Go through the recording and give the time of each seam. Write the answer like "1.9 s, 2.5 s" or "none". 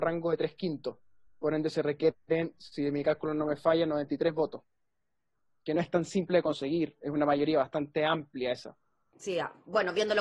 none

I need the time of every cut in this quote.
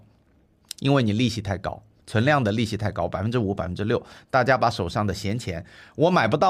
none

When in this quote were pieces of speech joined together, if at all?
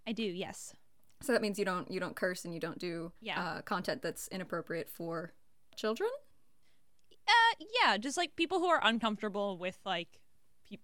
3.2 s

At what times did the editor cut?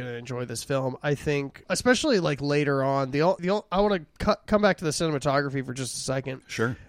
3.4 s

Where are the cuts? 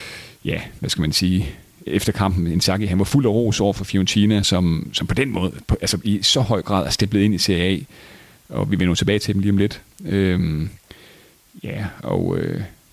none

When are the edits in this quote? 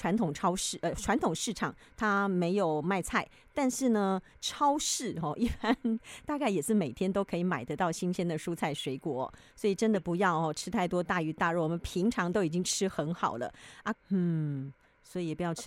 13.9 s

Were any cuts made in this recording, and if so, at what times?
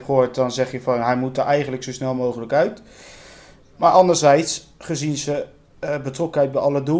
none

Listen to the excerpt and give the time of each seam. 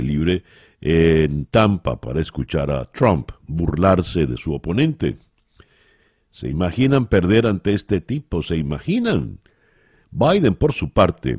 10.0 s

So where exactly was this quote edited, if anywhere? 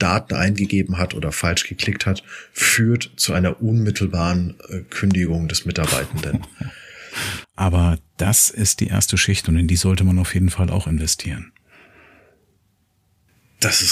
7.4 s

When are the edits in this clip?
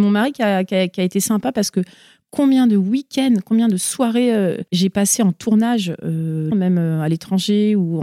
4.7 s, 6.5 s

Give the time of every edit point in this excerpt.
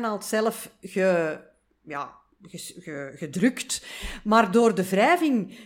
none

